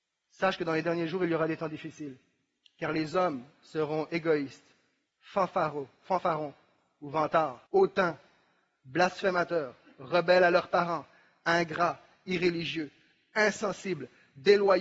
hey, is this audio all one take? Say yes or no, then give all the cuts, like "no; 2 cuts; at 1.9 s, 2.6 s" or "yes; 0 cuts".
no; 2 cuts; at 5.1 s, 7.7 s